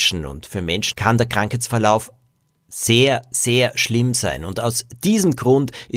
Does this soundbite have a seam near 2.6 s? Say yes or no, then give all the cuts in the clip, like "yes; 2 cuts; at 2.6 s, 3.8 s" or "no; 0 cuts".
no; 1 cut; at 0.9 s